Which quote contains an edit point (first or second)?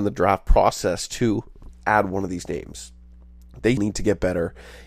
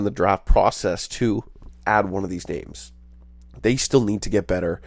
first